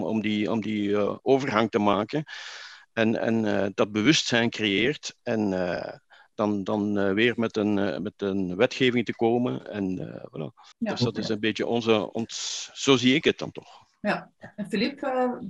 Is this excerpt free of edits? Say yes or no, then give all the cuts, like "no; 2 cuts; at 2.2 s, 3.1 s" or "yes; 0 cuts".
no; 1 cut; at 10.7 s